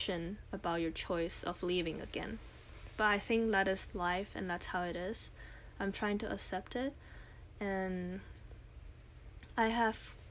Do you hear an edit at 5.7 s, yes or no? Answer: no